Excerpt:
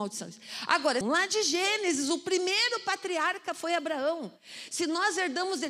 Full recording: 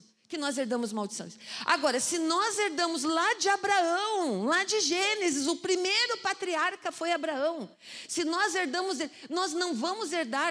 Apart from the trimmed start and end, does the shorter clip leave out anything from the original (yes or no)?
yes